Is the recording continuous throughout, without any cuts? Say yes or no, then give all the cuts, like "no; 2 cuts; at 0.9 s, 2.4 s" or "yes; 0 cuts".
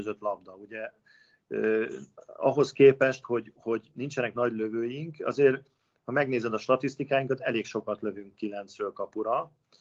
yes; 0 cuts